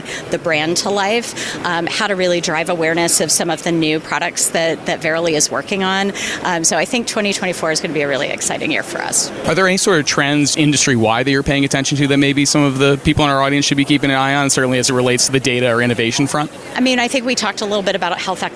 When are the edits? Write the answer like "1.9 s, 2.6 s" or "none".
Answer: 10.5 s